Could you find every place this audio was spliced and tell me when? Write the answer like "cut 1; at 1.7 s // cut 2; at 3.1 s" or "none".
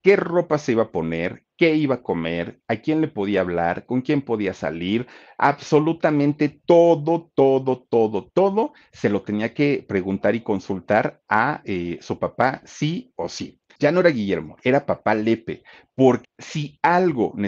cut 1; at 13.7 s // cut 2; at 16.2 s